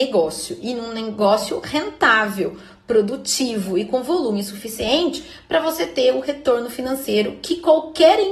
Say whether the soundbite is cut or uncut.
uncut